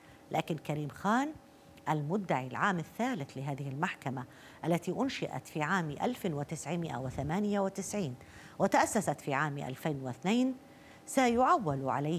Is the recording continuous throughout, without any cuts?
yes; 0 cuts

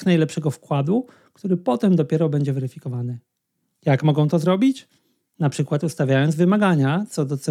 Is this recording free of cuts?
yes; 0 cuts

